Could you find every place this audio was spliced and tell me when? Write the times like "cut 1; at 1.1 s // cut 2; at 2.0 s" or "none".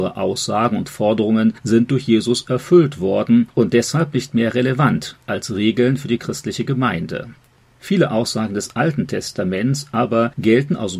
none